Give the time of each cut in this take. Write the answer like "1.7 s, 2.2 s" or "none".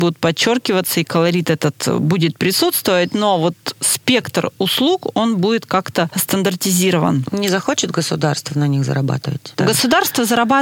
none